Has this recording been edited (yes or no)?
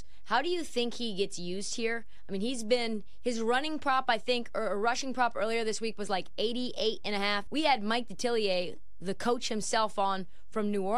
yes